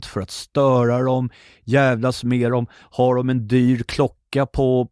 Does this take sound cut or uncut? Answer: uncut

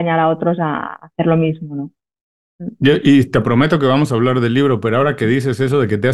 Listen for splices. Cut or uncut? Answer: uncut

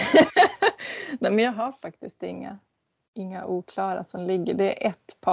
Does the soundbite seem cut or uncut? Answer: uncut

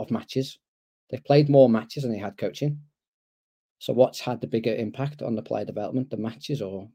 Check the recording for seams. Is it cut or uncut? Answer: uncut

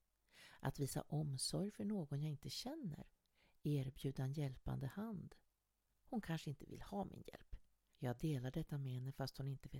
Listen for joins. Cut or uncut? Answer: cut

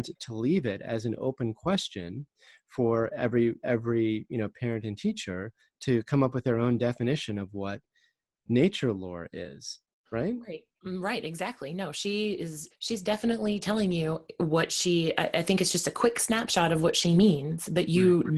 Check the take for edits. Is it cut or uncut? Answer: uncut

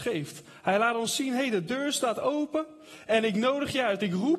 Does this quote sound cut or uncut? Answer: uncut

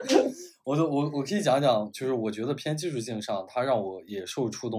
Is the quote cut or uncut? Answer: uncut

